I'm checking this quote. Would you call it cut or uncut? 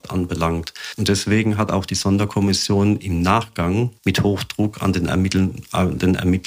cut